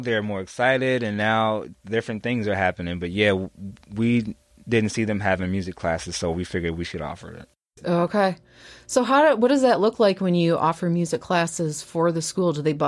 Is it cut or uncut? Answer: uncut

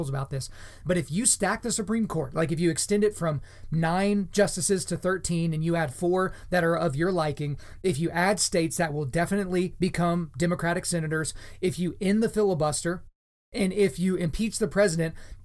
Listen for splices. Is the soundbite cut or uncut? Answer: uncut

